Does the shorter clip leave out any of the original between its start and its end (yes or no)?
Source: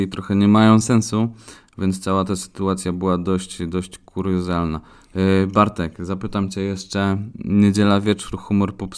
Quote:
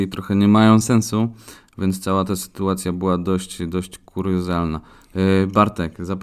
no